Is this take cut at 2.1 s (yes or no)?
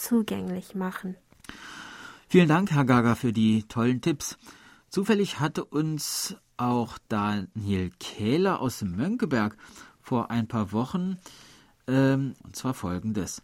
no